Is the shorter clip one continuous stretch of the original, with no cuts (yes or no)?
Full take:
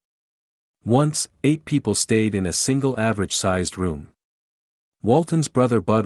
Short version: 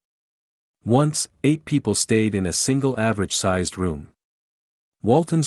yes